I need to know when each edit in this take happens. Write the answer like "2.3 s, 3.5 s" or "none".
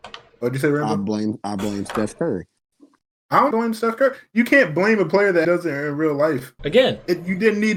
3.5 s, 5.4 s, 6.6 s

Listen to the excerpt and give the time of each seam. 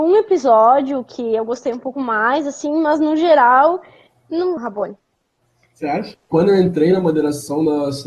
4.6 s, 6.1 s

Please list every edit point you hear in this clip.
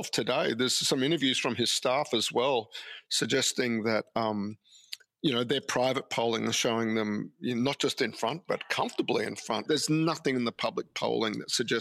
9.7 s

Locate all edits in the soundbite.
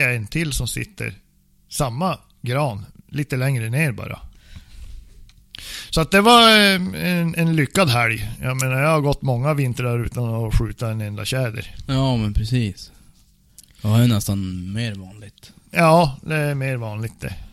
4.3 s

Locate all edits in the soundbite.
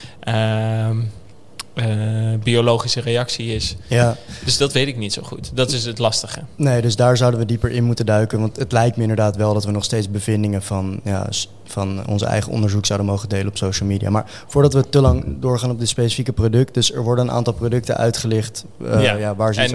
none

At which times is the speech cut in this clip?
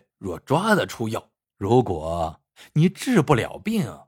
1.4 s

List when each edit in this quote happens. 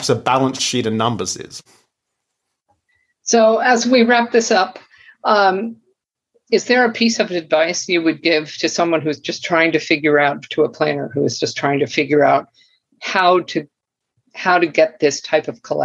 none

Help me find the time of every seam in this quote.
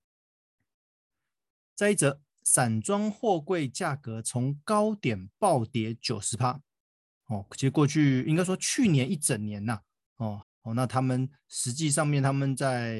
10.4 s

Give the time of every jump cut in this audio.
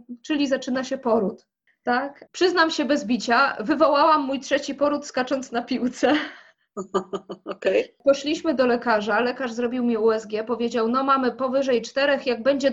none

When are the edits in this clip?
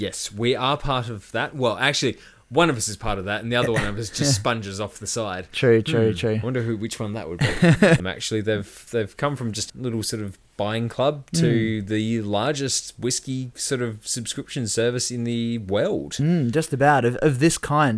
8.0 s, 9.7 s

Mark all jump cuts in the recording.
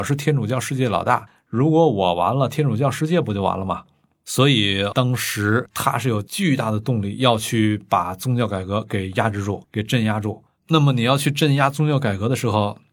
none

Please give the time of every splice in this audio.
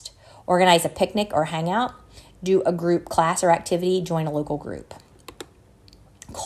none

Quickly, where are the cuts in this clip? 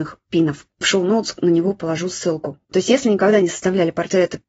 none

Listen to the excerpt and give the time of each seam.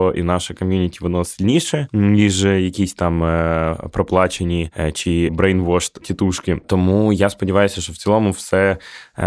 none

